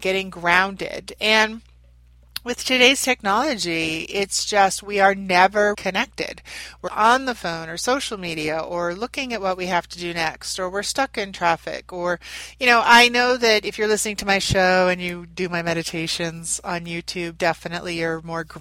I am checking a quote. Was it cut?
yes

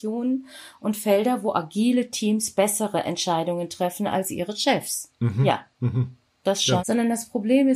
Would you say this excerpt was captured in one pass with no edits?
no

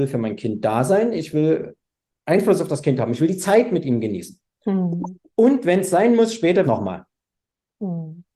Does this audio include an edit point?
yes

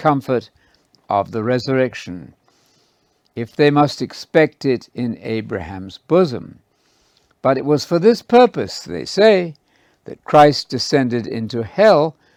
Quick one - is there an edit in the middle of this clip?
no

